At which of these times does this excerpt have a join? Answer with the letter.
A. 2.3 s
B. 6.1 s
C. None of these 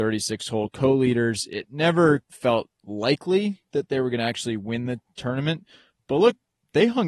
A